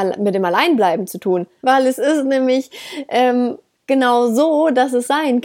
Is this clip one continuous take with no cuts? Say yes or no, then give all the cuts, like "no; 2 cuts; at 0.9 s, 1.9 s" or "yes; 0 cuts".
no; 1 cut; at 1.6 s